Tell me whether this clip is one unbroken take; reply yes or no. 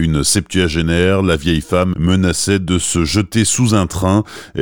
no